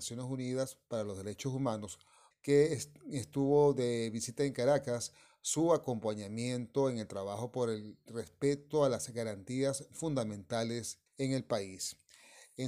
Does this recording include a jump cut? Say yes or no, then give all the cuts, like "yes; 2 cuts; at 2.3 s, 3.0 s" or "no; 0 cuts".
yes; 2 cuts; at 2.3 s, 11.1 s